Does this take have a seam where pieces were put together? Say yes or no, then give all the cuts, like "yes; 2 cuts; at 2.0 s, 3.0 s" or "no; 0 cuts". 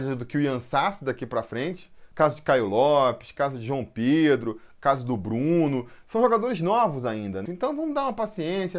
yes; 2 cuts; at 2.1 s, 7.5 s